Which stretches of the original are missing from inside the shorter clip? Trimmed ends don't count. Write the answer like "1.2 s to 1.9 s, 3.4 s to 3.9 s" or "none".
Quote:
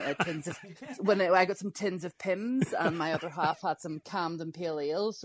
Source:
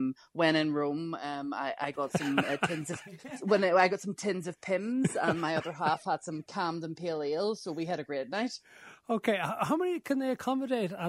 none